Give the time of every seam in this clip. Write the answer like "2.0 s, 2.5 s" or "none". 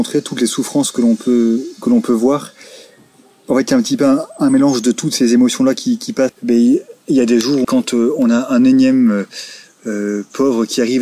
6.3 s, 7.6 s